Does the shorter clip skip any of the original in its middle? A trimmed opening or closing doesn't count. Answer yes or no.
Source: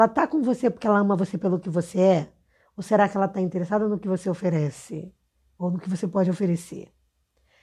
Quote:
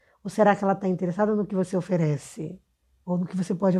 no